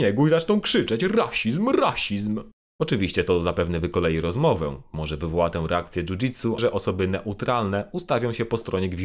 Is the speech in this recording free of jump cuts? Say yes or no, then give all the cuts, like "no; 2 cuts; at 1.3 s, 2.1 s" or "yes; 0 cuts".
no; 2 cuts; at 2.7 s, 6.6 s